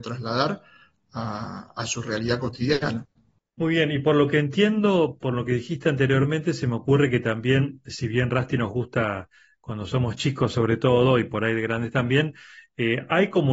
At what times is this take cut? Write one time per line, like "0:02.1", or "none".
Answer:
none